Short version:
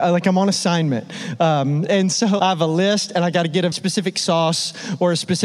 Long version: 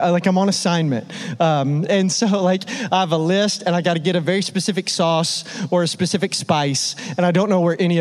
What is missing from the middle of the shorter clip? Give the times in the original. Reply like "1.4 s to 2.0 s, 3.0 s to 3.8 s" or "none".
2.4 s to 2.9 s, 4.2 s to 4.4 s